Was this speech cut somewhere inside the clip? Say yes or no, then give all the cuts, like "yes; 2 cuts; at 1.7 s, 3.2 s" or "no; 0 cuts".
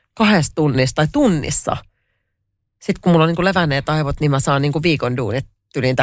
no; 0 cuts